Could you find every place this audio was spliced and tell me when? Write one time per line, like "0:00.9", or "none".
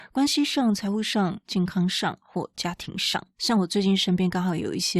none